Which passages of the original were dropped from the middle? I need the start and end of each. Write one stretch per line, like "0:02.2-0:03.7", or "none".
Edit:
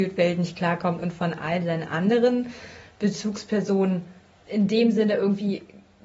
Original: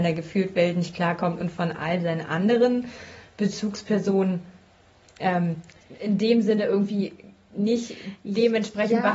0:04.9-0:06.0